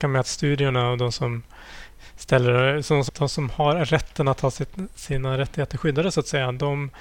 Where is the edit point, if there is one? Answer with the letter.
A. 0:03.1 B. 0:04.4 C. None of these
A